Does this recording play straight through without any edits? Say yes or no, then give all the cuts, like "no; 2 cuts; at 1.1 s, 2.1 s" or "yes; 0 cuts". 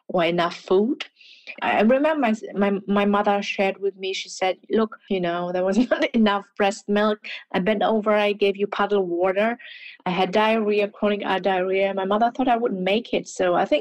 no; 1 cut; at 5.1 s